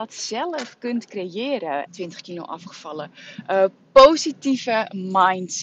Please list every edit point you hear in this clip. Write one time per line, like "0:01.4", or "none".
0:01.9

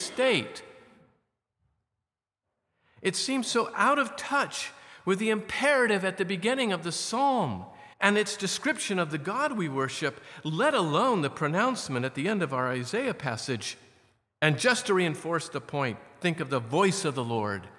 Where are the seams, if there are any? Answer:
0:07.9
0:14.3

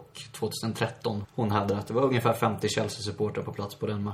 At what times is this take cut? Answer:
0:01.2

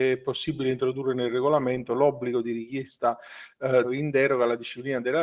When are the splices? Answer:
0:03.8

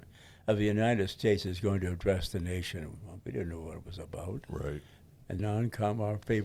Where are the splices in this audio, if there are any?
0:05.4

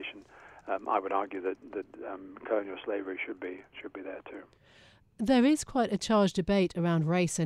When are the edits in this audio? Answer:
none

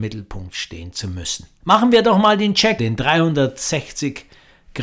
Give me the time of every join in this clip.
0:01.6
0:02.8

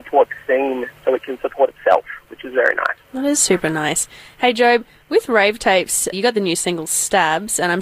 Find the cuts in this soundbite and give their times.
0:03.0
0:06.1

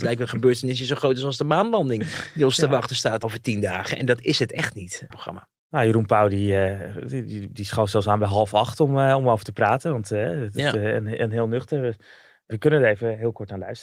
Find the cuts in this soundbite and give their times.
0:05.1

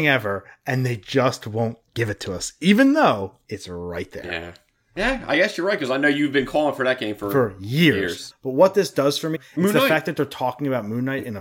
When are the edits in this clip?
0:08.3
0:09.3

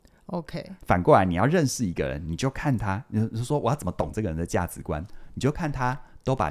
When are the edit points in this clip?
none

